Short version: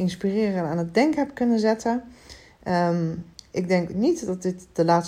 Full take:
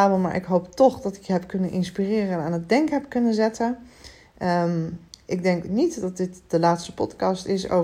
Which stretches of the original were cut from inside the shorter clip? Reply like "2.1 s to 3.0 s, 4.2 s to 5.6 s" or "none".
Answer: none